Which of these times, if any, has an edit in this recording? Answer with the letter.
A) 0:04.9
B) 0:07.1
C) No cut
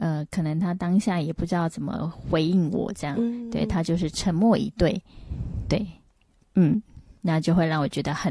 C